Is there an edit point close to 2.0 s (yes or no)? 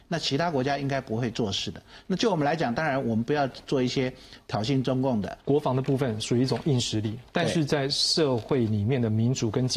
no